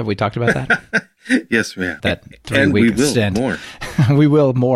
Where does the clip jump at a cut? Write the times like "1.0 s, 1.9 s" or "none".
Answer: 2.0 s

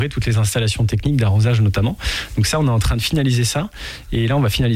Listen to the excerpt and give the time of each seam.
none

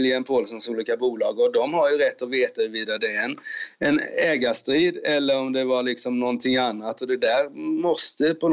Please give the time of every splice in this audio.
none

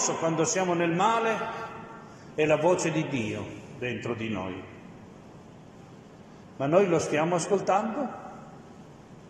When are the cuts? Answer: 6.5 s

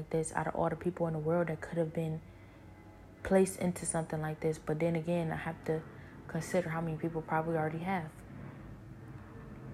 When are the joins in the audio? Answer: none

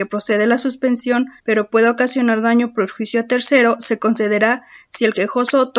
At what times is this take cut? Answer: 1.4 s

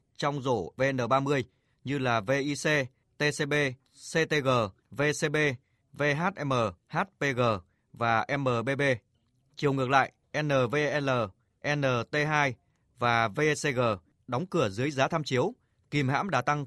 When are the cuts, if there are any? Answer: 6.8 s, 11.5 s

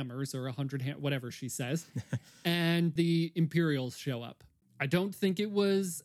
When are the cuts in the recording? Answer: 3.0 s, 4.6 s

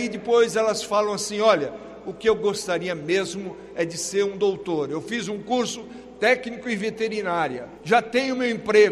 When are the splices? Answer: 7.7 s

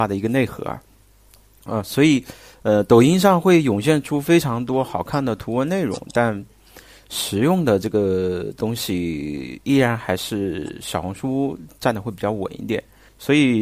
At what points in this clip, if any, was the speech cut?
none

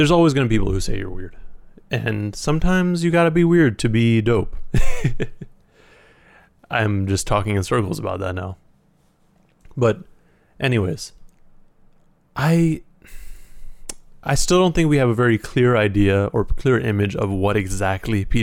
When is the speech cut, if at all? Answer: none

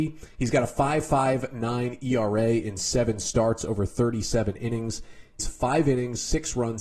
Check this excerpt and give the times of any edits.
5.4 s

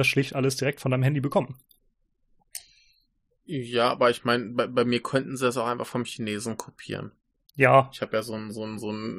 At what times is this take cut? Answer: none

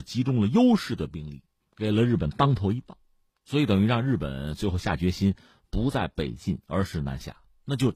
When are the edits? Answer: 1.6 s

